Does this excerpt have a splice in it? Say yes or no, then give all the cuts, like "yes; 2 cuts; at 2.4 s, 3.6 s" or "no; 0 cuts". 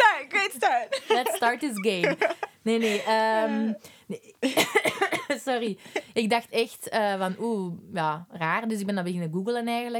no; 0 cuts